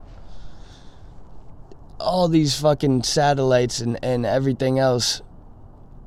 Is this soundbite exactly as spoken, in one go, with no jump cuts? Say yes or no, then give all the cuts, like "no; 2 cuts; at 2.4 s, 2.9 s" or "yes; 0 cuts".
yes; 0 cuts